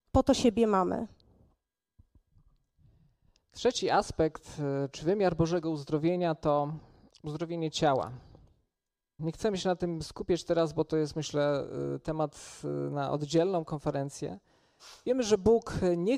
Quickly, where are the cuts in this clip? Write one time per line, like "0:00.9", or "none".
0:09.2